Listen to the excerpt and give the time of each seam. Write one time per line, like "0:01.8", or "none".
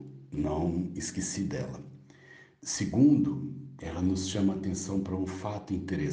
0:02.6
0:03.8